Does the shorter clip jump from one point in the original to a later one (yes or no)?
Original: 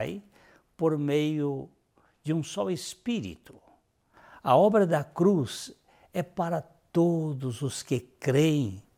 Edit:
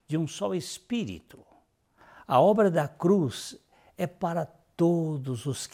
no